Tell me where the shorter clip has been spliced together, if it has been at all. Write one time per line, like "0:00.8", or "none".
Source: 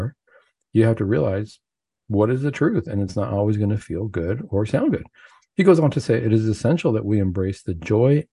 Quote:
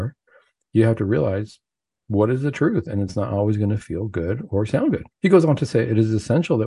0:05.1